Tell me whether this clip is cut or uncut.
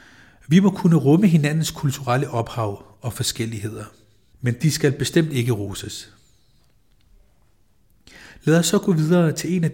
cut